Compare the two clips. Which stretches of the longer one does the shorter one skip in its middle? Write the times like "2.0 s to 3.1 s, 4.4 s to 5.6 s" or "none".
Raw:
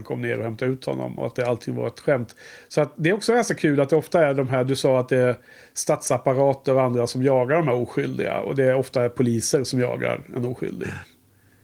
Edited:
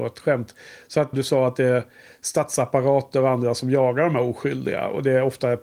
2.9 s to 4.7 s